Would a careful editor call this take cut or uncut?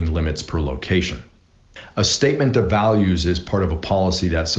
uncut